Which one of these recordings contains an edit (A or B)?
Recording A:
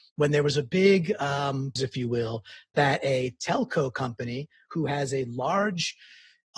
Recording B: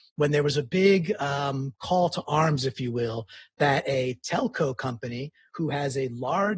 A